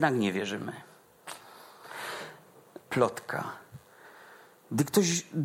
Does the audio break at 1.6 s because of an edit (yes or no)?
no